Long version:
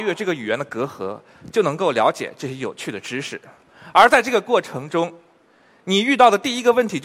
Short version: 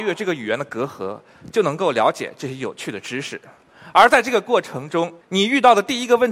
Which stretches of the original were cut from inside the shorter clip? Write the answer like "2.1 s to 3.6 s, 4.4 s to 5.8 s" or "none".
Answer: 5.2 s to 5.8 s

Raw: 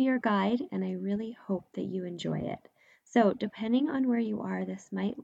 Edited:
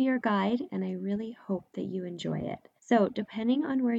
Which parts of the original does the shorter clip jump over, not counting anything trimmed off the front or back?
2.8 s to 3.0 s

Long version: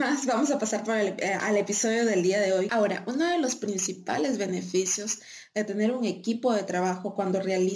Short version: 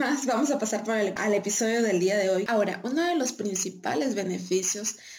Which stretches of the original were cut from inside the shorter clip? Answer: 1.2 s to 1.4 s

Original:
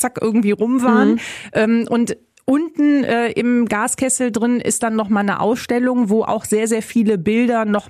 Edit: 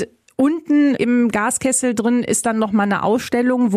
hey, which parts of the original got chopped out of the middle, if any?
3.1 s to 3.3 s

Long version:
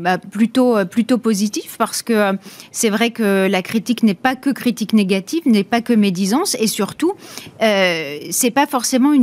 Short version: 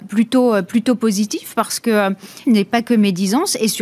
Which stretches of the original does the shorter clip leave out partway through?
2.7 s to 5.4 s

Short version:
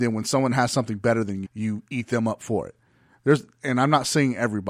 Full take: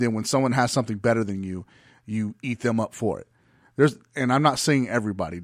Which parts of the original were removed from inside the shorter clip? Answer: 1.4 s to 2.0 s

